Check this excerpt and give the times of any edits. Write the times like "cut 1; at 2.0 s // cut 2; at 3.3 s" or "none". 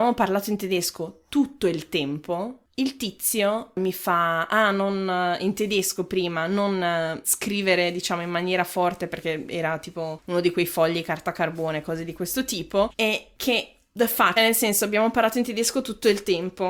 cut 1; at 12.9 s // cut 2; at 14.4 s